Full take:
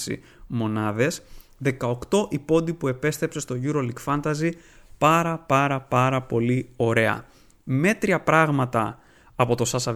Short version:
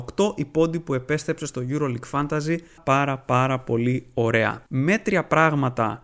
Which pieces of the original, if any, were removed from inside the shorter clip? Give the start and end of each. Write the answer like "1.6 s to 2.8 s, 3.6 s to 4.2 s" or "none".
4.7 s to 5.4 s, 7.3 s to 7.6 s